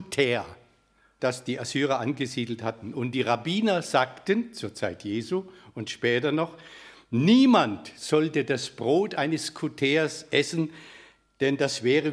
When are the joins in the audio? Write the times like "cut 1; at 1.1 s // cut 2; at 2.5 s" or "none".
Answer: cut 1; at 1.2 s